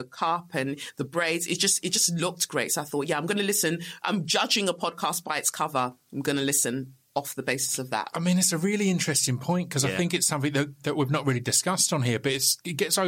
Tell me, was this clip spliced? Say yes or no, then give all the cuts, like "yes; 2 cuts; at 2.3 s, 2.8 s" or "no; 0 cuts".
no; 0 cuts